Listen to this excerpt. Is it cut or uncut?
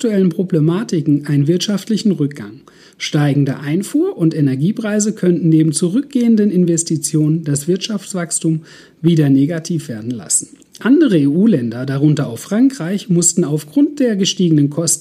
uncut